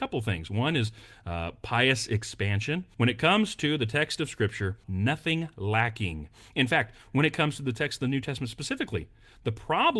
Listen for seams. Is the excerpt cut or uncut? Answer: cut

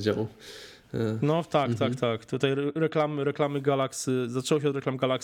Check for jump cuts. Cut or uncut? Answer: uncut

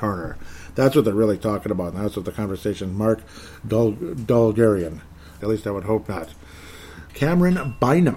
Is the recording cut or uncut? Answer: cut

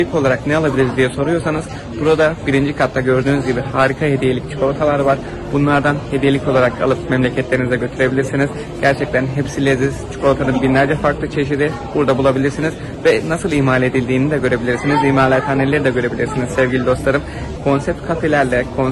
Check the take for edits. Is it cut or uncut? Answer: cut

